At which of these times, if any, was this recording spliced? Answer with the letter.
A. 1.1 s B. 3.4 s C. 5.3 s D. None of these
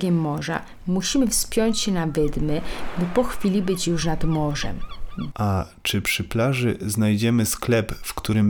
C